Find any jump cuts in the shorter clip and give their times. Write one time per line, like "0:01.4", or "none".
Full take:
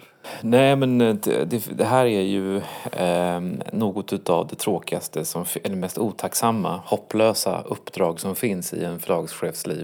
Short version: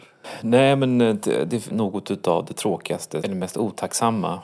0:01.7
0:03.2